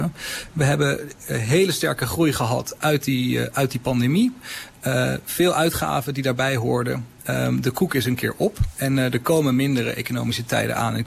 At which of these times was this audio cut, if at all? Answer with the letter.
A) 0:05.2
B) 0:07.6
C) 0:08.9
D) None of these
D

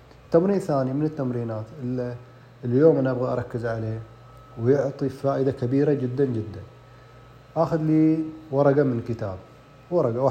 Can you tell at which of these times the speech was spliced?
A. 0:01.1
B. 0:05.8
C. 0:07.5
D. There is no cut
D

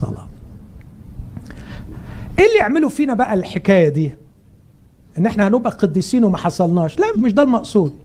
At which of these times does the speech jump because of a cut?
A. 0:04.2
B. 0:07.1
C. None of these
B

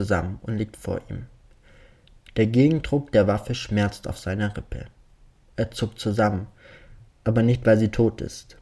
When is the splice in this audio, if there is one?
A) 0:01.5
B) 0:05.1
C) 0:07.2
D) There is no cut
D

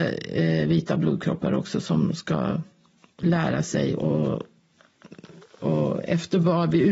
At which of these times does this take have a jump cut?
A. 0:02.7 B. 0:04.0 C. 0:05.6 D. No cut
B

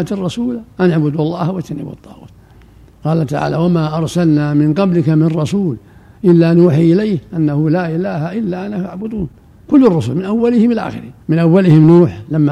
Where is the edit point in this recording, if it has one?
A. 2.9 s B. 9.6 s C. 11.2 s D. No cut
C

